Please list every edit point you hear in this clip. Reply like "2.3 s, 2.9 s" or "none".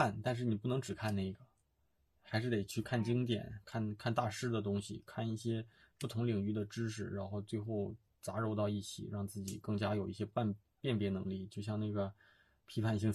none